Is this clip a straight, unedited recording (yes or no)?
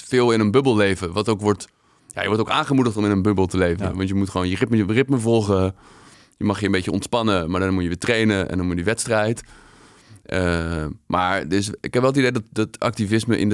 yes